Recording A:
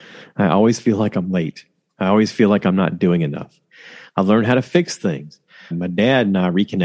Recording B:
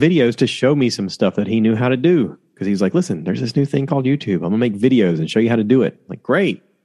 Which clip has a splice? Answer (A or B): A